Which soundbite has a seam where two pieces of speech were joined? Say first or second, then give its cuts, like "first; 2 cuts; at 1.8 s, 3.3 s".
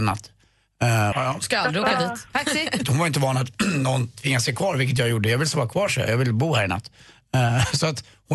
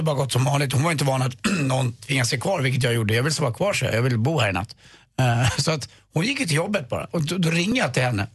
first; 2 cuts; at 1.1 s, 2.8 s